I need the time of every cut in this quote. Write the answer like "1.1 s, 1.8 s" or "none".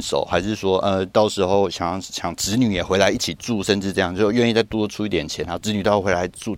none